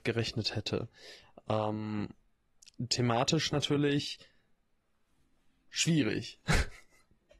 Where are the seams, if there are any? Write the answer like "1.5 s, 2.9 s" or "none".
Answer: none